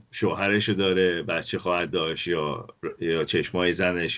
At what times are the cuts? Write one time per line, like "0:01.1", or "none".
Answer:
none